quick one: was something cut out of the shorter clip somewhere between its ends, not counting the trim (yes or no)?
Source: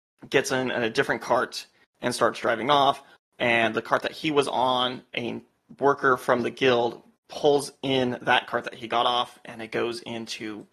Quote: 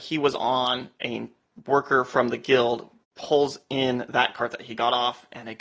no